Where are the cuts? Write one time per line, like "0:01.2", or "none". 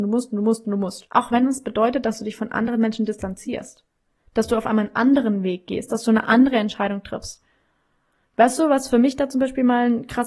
0:01.1